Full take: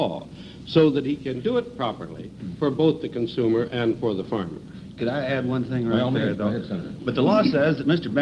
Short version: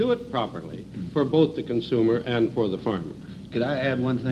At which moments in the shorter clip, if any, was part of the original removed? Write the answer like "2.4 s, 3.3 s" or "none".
none